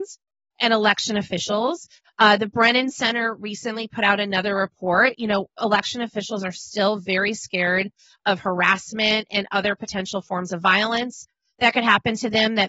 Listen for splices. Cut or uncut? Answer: uncut